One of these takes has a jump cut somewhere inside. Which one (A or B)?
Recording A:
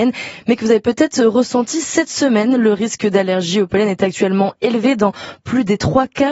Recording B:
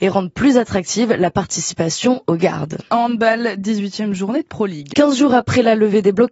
B